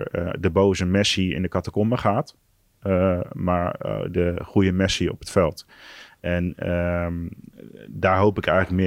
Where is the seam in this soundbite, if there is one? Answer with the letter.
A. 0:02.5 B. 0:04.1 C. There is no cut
B